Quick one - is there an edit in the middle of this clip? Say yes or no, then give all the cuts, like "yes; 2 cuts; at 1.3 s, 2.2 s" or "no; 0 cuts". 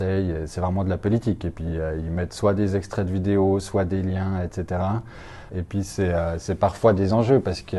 yes; 1 cut; at 5.5 s